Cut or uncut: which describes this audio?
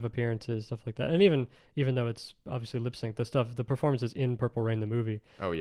uncut